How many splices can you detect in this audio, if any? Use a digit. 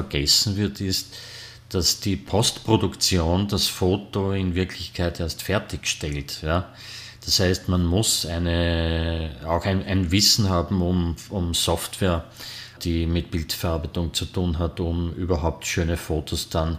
1